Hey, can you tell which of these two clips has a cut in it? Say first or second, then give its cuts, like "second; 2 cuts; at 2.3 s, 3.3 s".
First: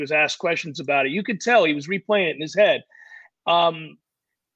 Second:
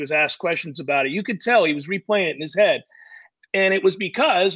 second; 1 cut; at 3.4 s